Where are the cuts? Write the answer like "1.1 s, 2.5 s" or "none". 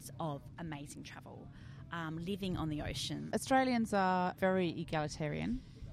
3.3 s, 4.4 s